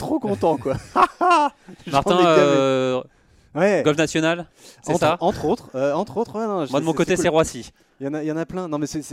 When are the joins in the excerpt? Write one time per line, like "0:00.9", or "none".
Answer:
none